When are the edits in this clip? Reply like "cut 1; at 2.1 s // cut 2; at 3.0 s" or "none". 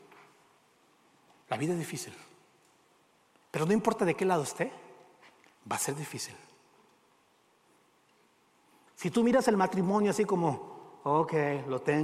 cut 1; at 8.9 s